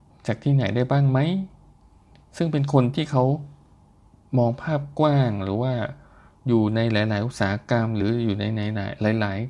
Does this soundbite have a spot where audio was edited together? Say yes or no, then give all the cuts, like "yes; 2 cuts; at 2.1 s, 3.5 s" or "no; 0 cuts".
no; 0 cuts